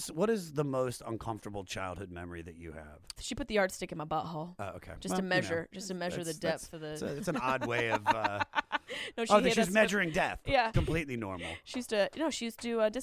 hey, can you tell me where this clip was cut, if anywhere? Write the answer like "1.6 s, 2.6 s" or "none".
3.2 s, 10.7 s